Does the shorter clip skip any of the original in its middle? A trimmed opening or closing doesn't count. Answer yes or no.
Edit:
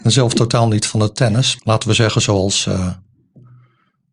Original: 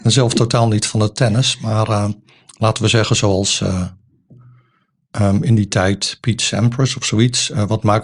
yes